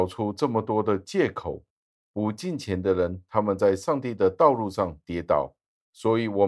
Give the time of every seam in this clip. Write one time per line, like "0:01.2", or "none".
none